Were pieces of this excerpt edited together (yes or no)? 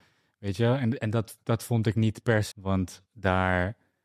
yes